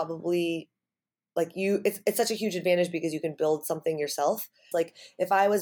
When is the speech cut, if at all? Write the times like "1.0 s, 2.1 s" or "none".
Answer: 4.7 s